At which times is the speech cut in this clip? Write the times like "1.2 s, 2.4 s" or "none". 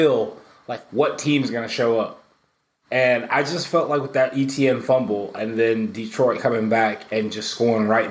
none